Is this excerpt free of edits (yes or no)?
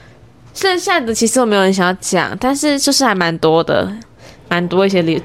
yes